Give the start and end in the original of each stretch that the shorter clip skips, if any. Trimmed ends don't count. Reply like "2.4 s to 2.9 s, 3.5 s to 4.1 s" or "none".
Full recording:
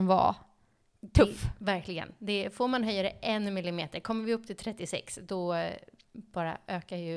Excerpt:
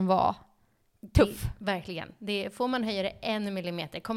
none